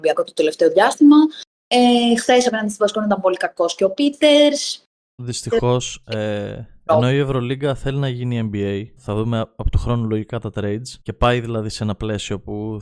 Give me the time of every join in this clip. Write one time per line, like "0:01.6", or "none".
0:05.2
0:09.0
0:11.0

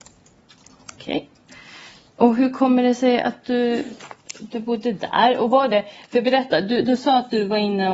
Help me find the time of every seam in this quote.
none

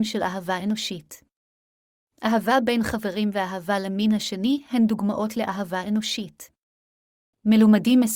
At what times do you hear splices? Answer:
none

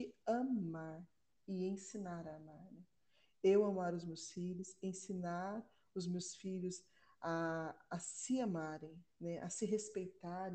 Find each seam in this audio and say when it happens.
none

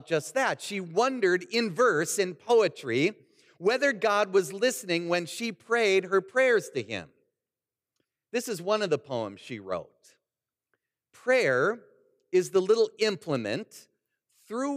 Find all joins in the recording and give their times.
none

